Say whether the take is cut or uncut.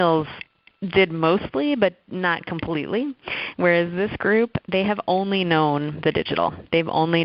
uncut